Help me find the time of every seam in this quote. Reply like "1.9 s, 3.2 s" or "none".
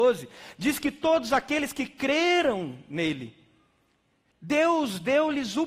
4.3 s